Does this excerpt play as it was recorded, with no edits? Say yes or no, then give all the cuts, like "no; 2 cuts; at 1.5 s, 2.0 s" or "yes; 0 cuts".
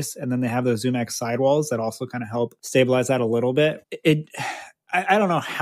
no; 2 cuts; at 2.6 s, 3.8 s